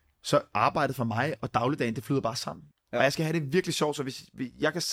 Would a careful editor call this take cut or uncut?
cut